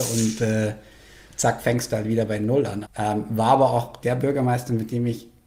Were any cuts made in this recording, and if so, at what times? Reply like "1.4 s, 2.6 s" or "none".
2.8 s, 4.0 s